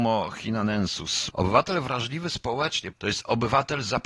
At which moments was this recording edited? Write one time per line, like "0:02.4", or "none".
0:01.3
0:02.9

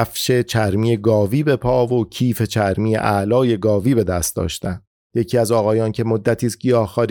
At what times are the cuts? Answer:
0:05.0

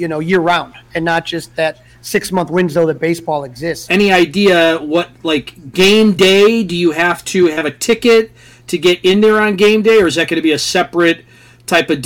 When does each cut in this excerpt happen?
0:03.9

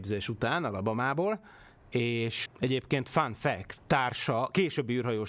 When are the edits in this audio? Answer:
0:02.5
0:03.8

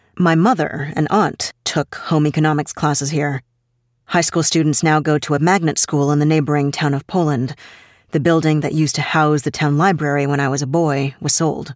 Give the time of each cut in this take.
none

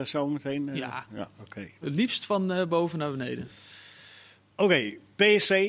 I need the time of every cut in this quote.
0:01.8

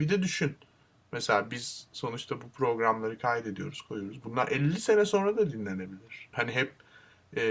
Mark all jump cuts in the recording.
0:06.3

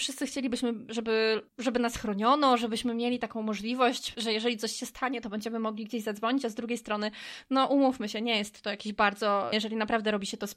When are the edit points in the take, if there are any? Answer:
0:01.5
0:09.5

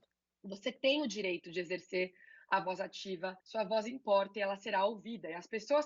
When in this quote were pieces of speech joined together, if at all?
0:03.4

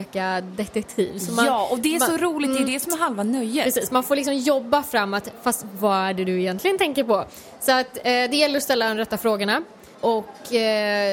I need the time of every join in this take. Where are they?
0:09.9

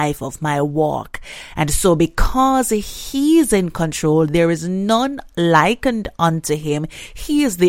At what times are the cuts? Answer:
none

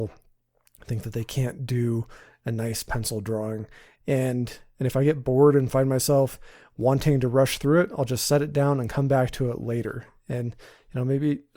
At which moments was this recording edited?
0:04.0

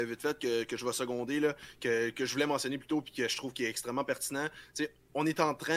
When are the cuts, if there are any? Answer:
none

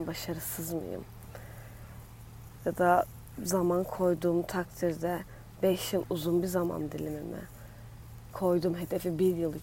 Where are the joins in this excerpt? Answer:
none

